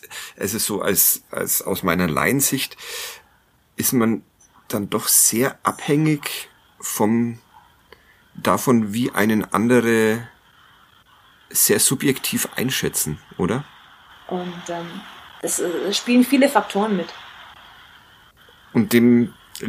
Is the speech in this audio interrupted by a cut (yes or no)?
yes